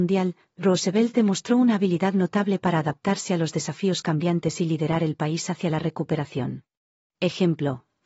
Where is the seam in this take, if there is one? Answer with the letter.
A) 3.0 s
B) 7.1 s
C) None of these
B